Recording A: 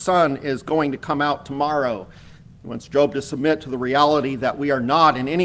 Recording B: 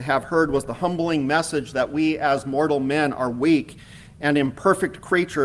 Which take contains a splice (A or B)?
A